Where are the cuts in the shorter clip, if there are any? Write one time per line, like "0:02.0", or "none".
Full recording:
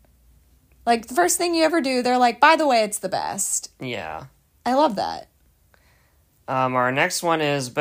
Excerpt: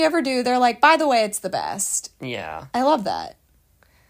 0:02.7